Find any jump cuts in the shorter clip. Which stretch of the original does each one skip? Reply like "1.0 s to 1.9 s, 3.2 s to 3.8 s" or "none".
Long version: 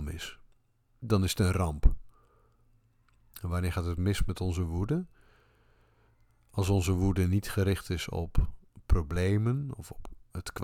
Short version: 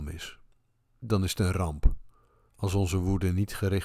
2.5 s to 6.4 s